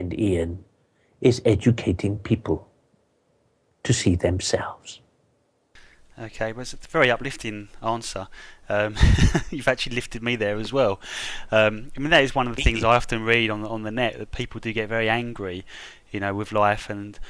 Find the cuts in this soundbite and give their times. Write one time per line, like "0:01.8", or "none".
none